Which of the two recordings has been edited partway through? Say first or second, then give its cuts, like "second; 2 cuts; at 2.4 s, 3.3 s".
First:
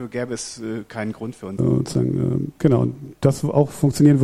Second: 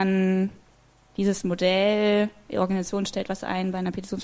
first; 1 cut; at 1.6 s